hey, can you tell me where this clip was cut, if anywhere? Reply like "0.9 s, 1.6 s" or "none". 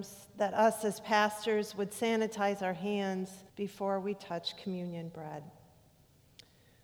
3.5 s